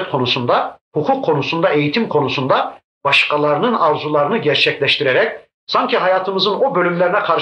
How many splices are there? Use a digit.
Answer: 0